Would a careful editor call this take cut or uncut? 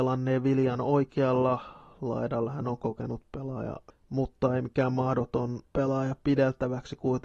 cut